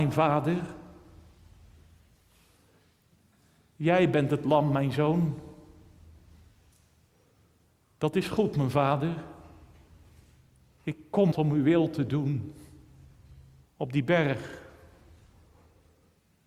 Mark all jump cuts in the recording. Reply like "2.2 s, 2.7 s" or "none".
11.3 s, 13.6 s